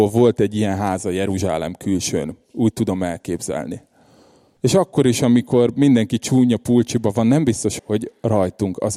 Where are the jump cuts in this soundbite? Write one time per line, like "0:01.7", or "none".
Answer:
0:04.6
0:07.8